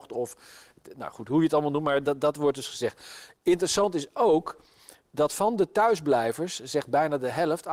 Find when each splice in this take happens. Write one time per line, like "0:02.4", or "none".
none